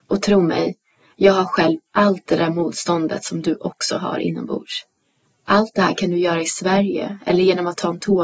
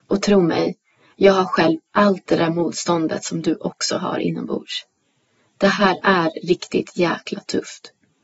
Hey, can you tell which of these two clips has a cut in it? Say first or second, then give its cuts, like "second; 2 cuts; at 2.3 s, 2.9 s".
first; 1 cut; at 5.2 s